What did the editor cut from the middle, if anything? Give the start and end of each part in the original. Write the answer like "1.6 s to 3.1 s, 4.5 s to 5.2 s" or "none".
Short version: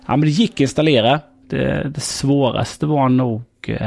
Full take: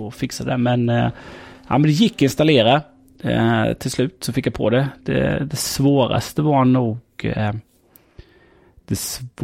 3.0 s to 5.0 s